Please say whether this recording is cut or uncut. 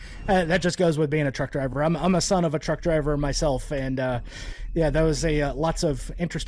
uncut